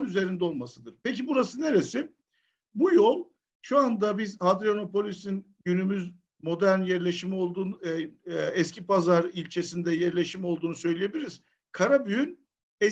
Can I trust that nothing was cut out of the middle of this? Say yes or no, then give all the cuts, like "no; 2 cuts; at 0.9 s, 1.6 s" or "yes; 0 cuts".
yes; 0 cuts